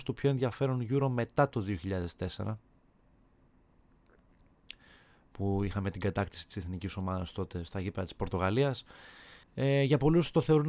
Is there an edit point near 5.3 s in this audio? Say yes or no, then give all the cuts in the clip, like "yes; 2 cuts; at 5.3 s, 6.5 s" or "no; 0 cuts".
no; 1 cut; at 9.4 s